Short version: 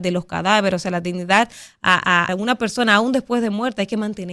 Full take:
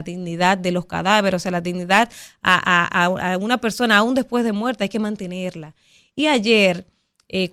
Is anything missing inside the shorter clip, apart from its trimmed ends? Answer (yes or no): yes